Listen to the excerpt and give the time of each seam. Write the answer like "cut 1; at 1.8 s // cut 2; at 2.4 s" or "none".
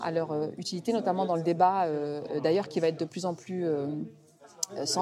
none